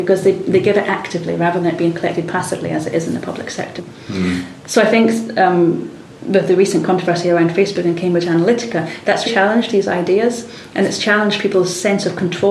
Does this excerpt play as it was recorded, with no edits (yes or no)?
no